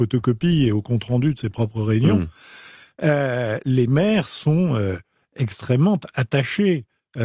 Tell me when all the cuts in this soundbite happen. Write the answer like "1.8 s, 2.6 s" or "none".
none